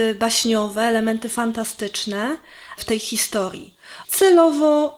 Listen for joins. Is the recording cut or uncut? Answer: cut